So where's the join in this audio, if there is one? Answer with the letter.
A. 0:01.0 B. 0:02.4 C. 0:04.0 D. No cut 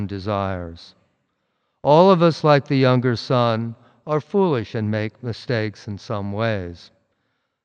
D